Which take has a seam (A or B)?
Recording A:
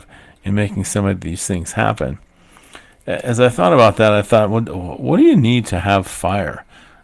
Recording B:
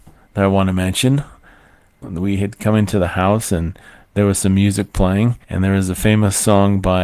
B